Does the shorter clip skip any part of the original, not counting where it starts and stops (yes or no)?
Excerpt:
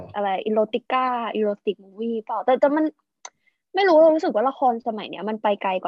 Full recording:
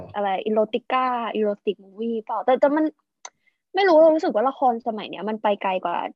no